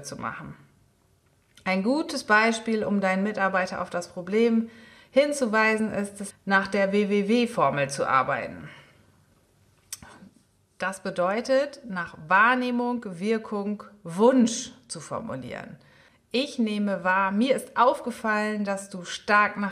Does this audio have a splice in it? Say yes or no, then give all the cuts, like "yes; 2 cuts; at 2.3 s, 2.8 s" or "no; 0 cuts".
yes; 1 cut; at 6.3 s